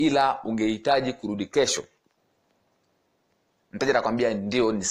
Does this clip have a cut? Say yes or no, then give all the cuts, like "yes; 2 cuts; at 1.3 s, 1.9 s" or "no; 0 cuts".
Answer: no; 0 cuts